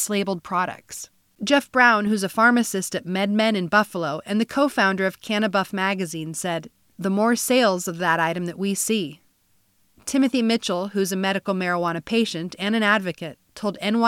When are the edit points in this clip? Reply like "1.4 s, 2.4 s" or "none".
1.4 s, 6.9 s